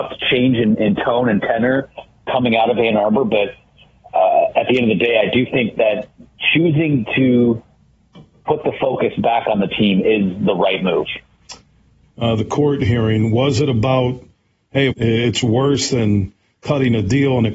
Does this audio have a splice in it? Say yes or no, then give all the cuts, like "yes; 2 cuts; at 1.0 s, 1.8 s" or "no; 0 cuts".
yes; 2 cuts; at 12.0 s, 14.9 s